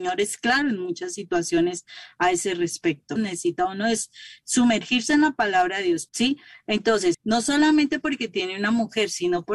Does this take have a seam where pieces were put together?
yes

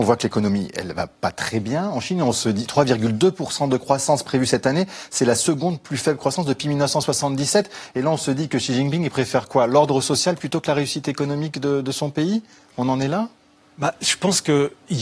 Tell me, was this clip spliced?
no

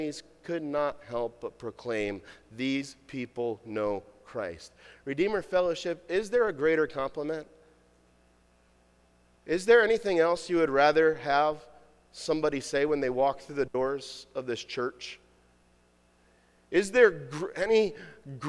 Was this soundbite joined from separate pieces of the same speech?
no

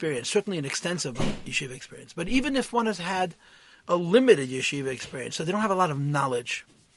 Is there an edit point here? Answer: no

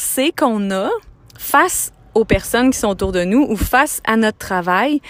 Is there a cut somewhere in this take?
no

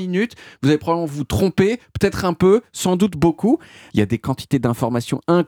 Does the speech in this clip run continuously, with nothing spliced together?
no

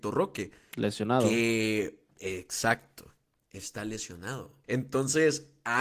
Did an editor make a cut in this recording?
yes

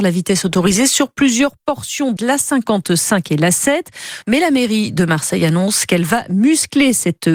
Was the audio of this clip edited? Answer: yes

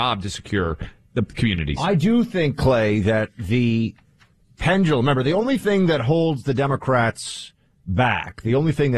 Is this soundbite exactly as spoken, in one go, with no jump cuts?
yes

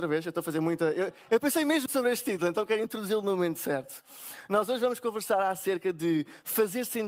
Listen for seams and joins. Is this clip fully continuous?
no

